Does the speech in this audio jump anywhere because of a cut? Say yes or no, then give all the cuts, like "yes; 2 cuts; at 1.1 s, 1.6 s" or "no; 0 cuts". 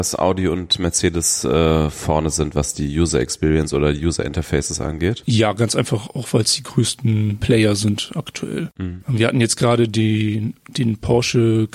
no; 0 cuts